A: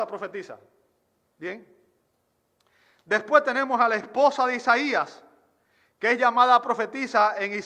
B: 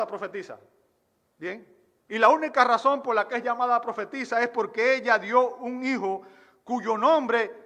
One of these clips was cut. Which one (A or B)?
B